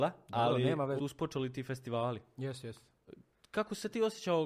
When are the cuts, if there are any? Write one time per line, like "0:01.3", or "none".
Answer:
0:01.0